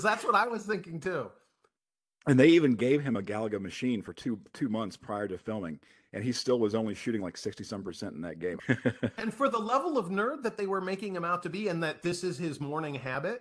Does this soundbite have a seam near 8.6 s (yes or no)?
yes